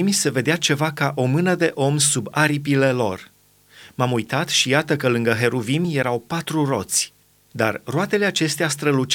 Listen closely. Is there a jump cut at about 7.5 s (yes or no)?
yes